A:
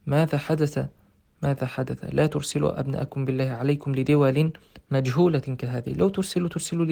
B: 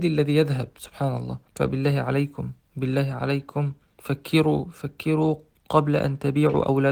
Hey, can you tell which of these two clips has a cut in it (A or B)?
B